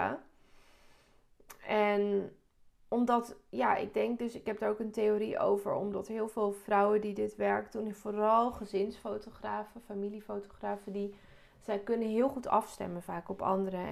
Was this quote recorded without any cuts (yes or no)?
yes